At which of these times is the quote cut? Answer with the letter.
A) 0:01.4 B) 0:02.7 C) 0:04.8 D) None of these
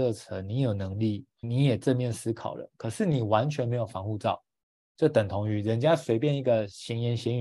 A